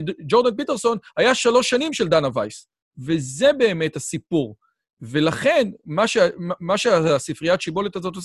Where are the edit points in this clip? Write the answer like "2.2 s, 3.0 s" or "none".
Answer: none